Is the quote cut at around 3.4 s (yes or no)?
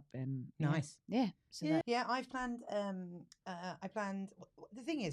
no